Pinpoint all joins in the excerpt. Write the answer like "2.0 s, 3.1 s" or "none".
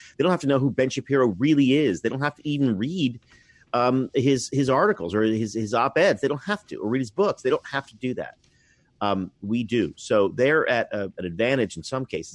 none